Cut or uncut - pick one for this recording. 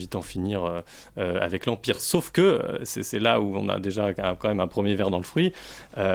uncut